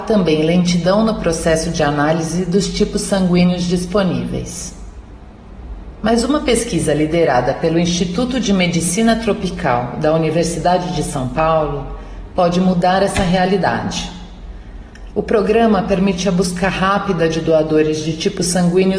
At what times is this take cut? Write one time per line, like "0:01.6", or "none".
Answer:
0:15.1